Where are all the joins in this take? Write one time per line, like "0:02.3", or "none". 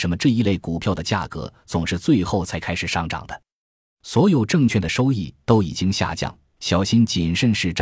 0:06.6